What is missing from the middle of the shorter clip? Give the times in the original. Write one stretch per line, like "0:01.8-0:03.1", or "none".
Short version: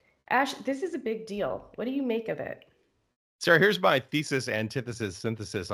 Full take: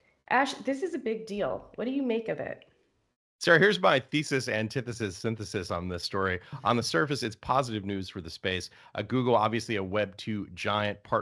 none